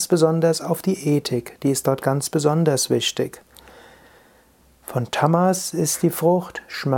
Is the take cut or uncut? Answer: uncut